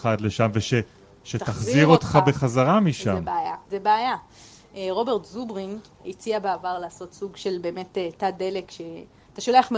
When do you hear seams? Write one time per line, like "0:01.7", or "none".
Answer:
0:03.7
0:06.0